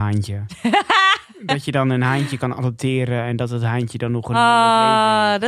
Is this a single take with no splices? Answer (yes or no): yes